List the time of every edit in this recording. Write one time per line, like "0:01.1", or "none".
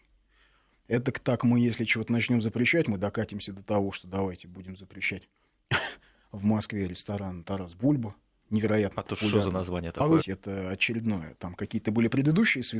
0:10.2